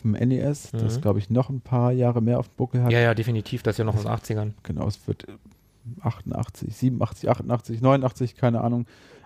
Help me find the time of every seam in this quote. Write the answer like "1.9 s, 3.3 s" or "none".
none